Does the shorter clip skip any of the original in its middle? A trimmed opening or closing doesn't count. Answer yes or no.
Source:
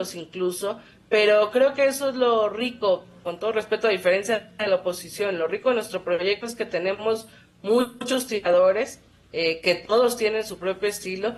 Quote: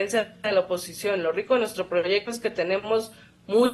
no